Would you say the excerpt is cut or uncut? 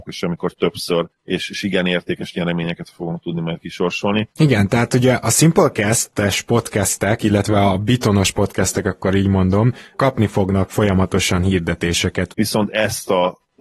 cut